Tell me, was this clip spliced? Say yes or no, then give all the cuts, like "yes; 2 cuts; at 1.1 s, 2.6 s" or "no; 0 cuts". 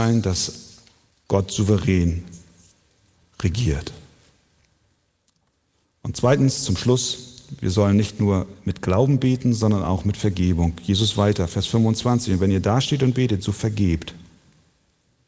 no; 0 cuts